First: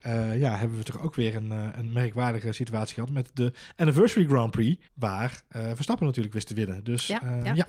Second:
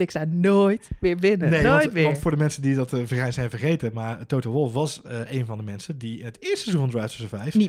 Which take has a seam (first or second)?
first